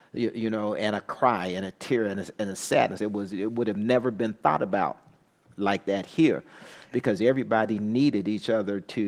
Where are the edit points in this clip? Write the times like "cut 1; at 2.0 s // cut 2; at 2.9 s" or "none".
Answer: cut 1; at 3.0 s